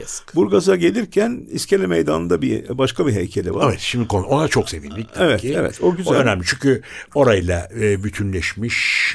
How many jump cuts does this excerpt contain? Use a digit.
0